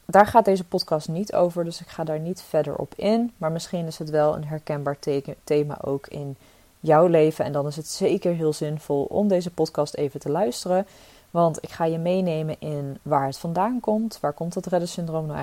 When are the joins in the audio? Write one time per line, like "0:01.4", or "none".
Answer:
none